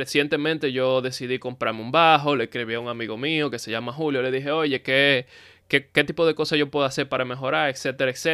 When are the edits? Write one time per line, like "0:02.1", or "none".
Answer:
none